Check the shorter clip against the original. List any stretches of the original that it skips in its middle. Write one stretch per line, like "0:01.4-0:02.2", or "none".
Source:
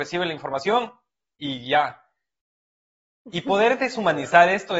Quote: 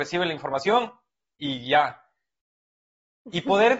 none